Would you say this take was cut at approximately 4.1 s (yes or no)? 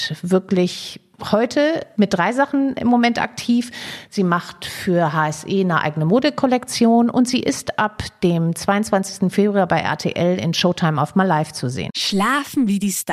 yes